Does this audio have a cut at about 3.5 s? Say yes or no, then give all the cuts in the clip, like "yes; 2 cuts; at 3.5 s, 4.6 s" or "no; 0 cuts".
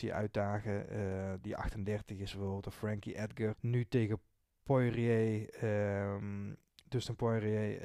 yes; 1 cut; at 3.5 s